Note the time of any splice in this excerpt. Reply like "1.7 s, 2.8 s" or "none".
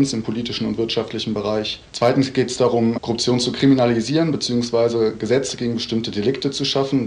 none